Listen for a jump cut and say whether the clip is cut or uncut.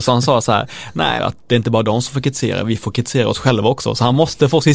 cut